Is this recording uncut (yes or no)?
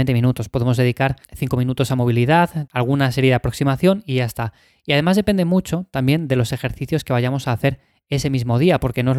no